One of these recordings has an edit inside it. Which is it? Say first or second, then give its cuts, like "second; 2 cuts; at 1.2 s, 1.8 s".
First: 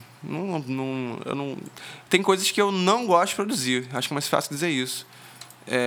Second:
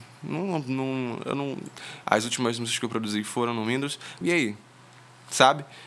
second; 2 cuts; at 2.0 s, 4.2 s